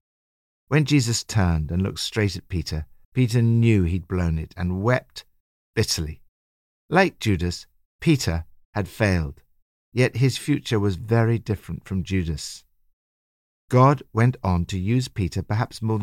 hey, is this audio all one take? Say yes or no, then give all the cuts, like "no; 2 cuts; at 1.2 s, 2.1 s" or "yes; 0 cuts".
yes; 0 cuts